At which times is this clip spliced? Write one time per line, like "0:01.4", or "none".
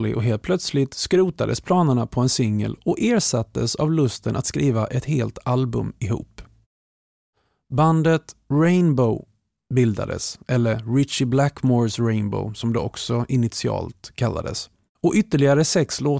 none